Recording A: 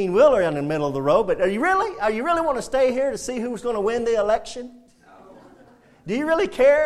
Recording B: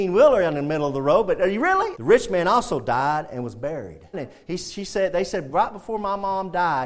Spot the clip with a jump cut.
B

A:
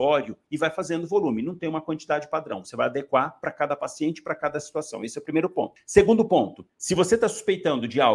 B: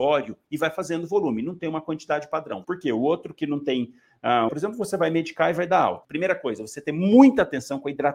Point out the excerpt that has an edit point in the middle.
B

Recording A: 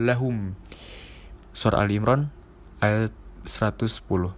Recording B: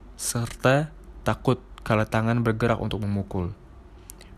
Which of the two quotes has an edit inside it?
A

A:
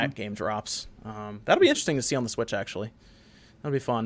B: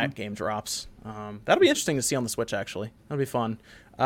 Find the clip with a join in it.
B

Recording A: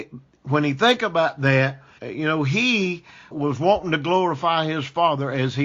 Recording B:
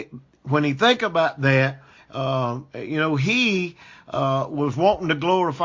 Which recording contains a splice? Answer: A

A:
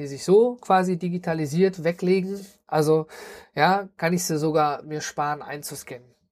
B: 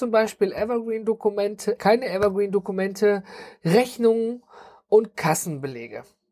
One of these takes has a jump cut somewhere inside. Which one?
B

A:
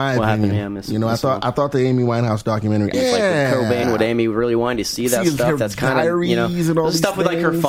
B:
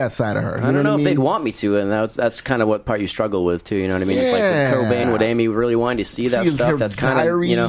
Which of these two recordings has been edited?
A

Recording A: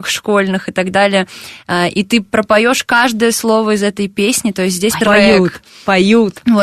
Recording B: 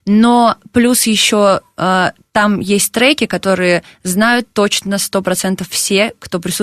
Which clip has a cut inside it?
A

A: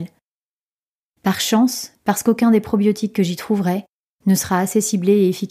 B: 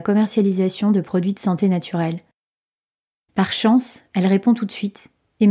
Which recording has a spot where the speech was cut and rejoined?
A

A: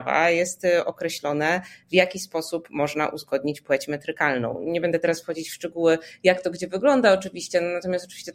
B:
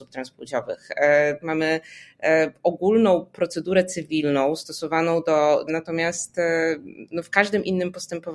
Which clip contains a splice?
B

